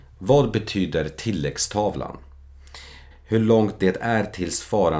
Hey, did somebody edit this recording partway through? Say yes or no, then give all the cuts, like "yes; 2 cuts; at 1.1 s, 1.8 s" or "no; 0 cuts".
yes; 1 cut; at 3.1 s